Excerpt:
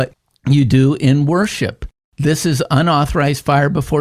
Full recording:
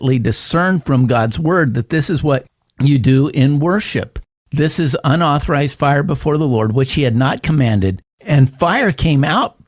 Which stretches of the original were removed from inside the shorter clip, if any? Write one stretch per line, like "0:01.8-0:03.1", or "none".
none

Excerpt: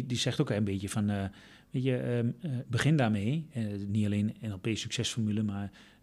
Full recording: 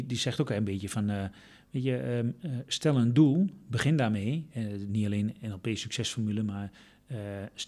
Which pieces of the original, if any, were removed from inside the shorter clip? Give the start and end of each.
0:02.6-0:03.6

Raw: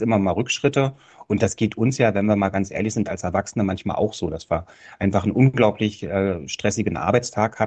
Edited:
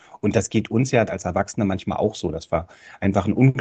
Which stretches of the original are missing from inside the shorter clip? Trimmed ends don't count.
0:02.1-0:03.0

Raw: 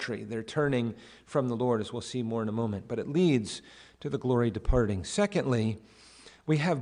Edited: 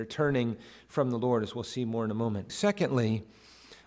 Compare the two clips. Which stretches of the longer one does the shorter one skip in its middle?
0:02.9-0:05.0

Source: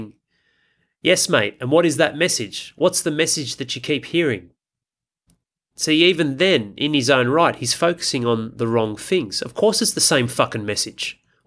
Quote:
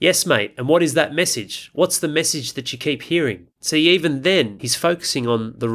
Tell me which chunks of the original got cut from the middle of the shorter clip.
0:04.5-0:05.7
0:06.7-0:07.6

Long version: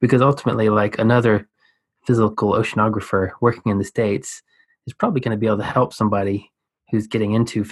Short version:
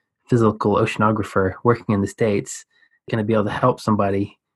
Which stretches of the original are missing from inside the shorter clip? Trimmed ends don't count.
0:04.8-0:05.2

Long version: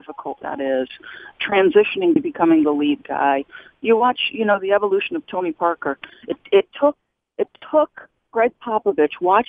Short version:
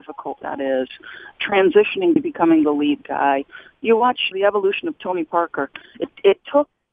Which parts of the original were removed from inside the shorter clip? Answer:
0:04.3-0:04.6

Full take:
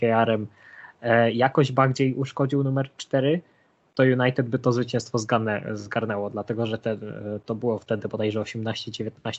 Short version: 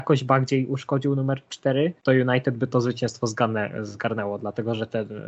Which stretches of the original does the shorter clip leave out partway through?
0:03.5-0:03.9

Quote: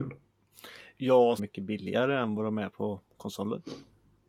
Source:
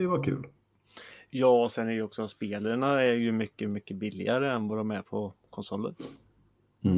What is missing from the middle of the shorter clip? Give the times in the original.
0:01.7-0:03.7

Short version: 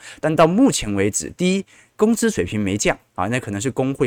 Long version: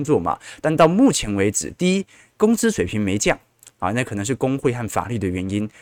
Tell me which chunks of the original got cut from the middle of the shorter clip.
0:03.5-0:03.7

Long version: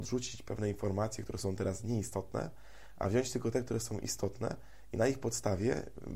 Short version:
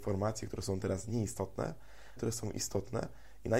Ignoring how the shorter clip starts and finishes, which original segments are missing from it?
0:02.9-0:03.6

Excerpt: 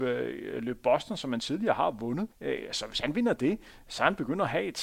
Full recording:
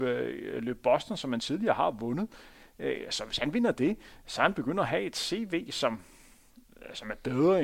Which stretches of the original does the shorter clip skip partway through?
0:02.3-0:02.7

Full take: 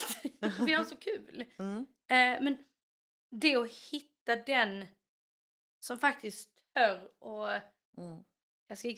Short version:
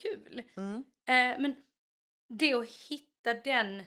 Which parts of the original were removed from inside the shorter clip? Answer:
none

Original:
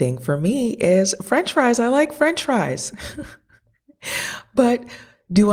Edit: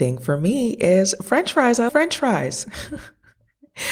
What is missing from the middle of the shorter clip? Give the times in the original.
0:01.9-0:02.1

